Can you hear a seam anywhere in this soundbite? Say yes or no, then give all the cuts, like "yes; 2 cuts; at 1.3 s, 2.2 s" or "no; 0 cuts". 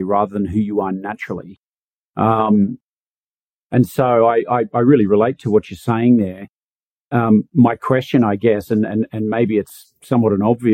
no; 0 cuts